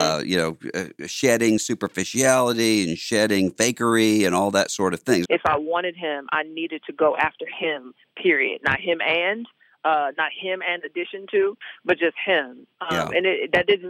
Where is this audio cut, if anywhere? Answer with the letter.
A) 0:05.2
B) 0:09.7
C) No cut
A